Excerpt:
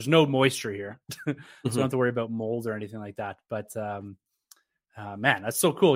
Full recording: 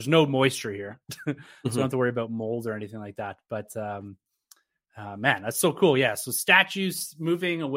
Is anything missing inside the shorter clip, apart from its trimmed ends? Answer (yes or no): no